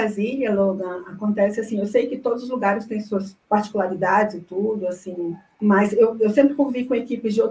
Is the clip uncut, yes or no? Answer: yes